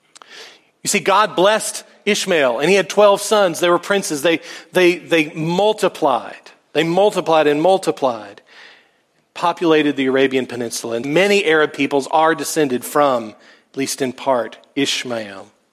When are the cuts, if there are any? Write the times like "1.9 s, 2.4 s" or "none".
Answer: 11.0 s

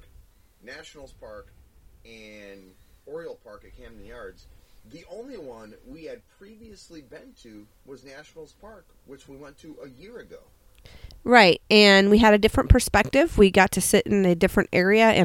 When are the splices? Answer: none

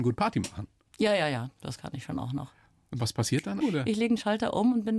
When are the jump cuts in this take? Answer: 3.6 s

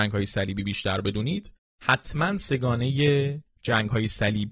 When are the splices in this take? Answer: none

